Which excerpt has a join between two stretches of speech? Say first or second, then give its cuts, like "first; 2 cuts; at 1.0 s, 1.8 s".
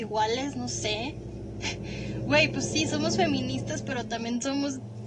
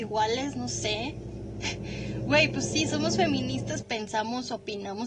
second; 1 cut; at 3.8 s